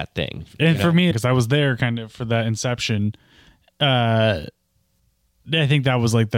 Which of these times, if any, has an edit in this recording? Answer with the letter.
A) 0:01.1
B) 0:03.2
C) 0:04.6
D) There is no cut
A